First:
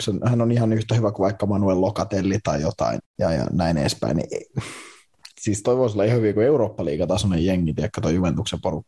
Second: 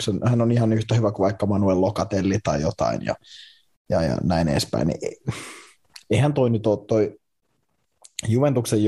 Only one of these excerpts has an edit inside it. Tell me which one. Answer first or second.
first